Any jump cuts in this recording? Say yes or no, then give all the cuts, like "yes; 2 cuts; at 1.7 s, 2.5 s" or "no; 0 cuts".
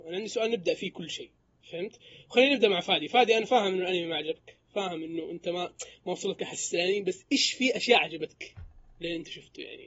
no; 0 cuts